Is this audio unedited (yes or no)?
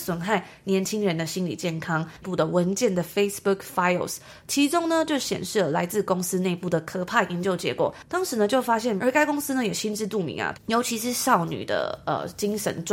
no